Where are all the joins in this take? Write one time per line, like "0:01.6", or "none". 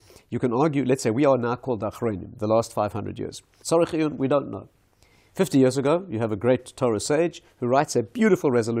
0:03.6

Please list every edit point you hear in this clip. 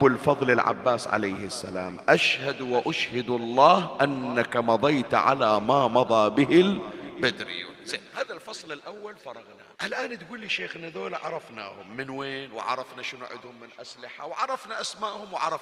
0:09.7

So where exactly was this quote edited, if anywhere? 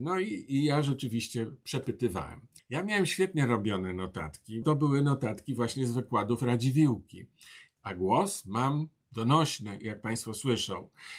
0:02.6
0:04.6
0:07.8

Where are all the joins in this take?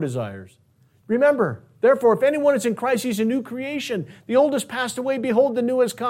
0:01.0

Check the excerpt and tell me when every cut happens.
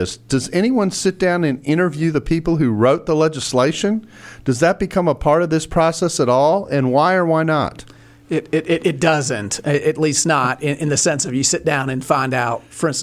none

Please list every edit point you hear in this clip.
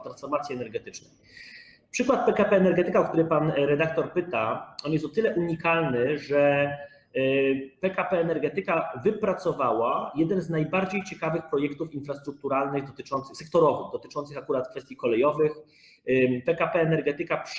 none

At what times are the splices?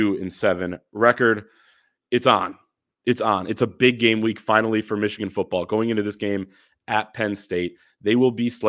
0:02.0

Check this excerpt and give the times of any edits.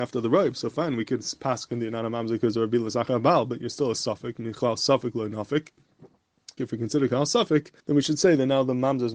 0:06.6
0:07.8

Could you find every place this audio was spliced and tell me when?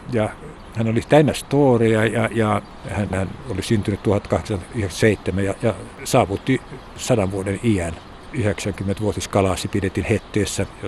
0:03.1

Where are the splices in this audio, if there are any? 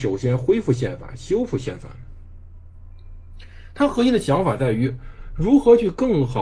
none

